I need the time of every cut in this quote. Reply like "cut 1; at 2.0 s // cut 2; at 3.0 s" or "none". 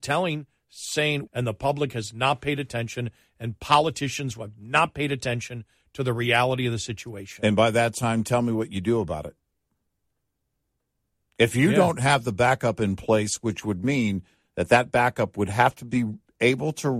cut 1; at 1.3 s